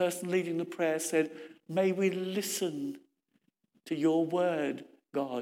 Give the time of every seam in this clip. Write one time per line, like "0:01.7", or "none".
none